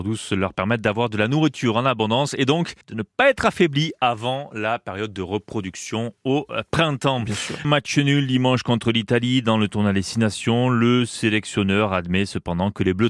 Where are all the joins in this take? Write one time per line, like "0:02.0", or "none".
0:02.8
0:07.6